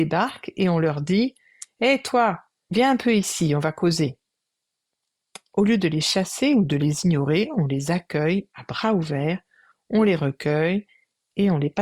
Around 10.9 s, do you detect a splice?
no; 0 cuts

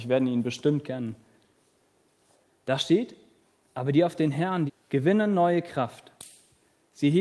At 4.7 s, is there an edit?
yes; 1 cut; at 4.7 s

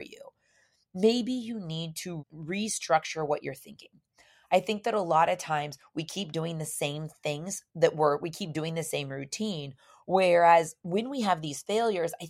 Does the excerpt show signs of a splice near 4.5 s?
no; 1 cut; at 2.2 s

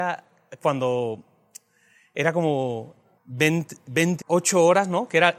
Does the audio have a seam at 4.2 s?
yes; 2 cuts; at 3.2 s, 4.2 s

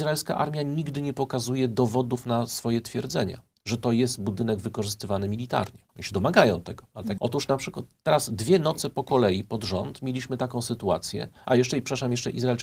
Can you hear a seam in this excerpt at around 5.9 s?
yes; 2 cuts; at 5.9 s, 7.2 s

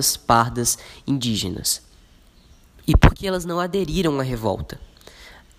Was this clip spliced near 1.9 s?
no; 0 cuts

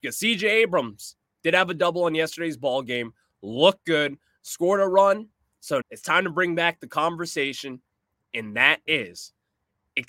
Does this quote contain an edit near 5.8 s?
yes; 1 cut; at 5.8 s

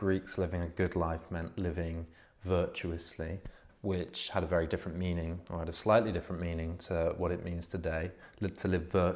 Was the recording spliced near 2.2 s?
no; 1 cut; at 3.7 s

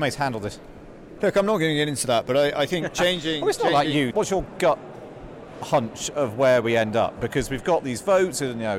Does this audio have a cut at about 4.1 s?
yes; 1 cut; at 4.1 s

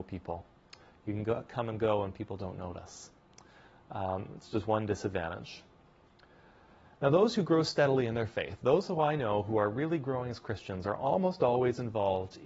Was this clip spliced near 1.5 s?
no; 0 cuts

